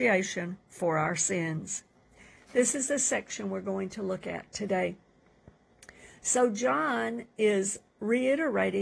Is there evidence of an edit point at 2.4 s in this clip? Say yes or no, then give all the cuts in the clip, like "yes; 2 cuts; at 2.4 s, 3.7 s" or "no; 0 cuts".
yes; 1 cut; at 2.4 s